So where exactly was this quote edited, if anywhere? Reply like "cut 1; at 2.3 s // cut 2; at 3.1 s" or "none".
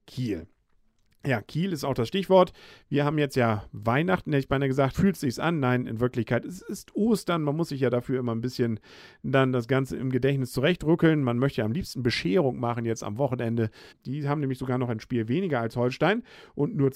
cut 1; at 4.9 s // cut 2; at 13.9 s